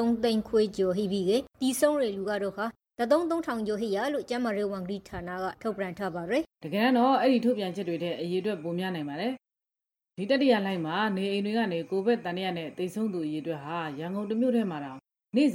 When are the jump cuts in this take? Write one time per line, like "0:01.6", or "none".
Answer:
0:01.5
0:06.5